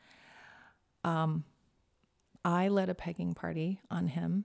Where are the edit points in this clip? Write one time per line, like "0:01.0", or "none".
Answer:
none